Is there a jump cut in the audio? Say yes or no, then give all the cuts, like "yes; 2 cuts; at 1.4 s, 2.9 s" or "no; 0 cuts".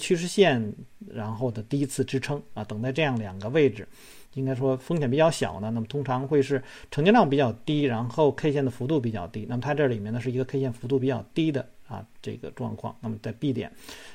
yes; 1 cut; at 4.3 s